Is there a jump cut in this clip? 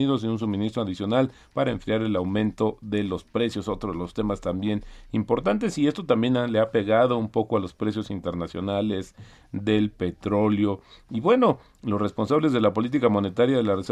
no; 0 cuts

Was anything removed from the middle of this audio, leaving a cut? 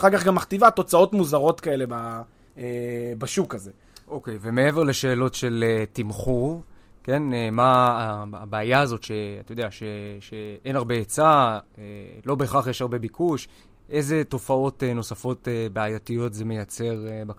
no; 0 cuts

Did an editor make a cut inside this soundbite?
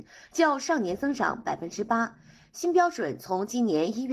no; 0 cuts

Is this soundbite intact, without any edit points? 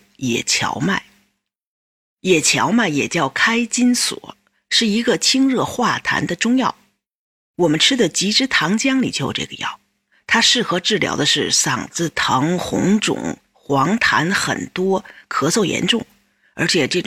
yes; 0 cuts

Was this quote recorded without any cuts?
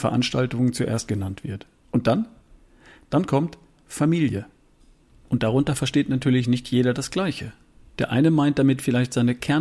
yes; 0 cuts

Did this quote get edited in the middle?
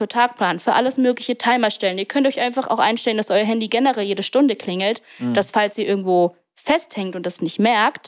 no; 0 cuts

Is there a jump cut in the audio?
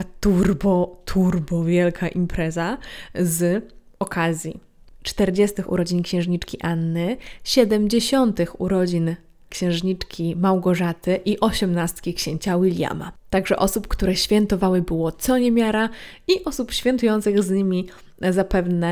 yes; 1 cut; at 5.7 s

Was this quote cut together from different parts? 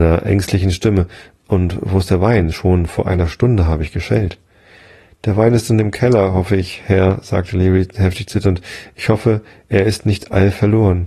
no; 0 cuts

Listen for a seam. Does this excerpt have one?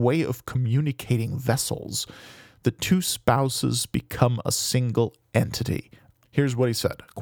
yes; 1 cut; at 6.2 s

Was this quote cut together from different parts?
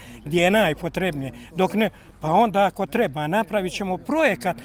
no; 0 cuts

